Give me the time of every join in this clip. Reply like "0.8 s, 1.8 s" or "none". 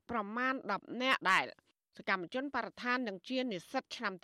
1.2 s